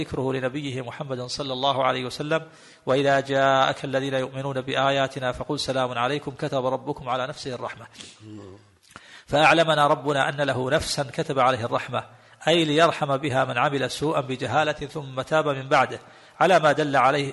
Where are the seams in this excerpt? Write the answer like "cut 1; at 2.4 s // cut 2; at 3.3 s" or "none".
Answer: none